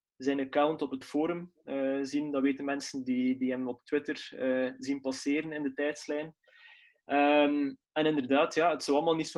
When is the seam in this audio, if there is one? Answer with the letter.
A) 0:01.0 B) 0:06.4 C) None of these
A